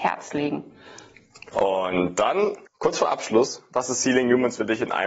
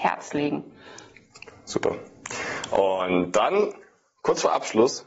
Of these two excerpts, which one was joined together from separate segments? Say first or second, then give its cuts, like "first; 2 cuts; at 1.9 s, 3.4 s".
first; 2 cuts; at 1.5 s, 2.7 s